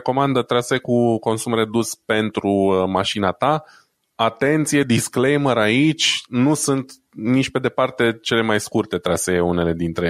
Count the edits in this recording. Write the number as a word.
zero